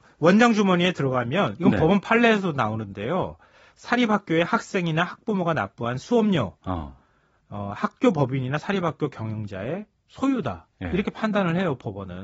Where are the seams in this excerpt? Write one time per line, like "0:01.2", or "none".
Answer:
none

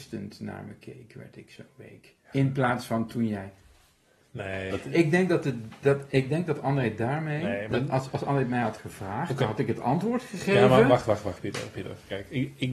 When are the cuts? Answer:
0:04.7

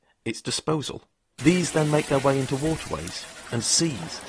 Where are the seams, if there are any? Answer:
0:01.4

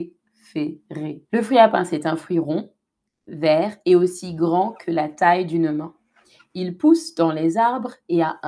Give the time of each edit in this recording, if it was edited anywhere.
0:01.3

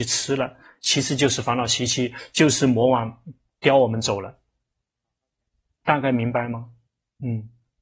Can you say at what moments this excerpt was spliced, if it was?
none

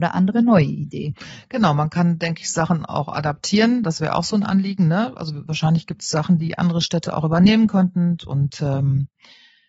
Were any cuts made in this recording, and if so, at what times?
0:06.4
0:08.2

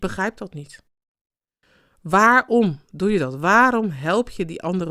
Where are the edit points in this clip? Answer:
none

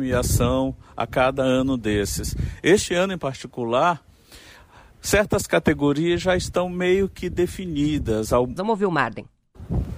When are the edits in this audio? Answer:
0:08.6

